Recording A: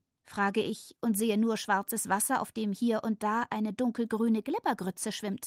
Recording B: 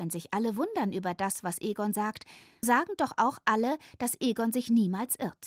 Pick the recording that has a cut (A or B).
B